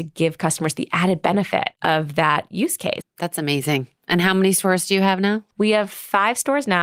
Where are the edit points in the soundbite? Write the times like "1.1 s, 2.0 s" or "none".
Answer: 3.0 s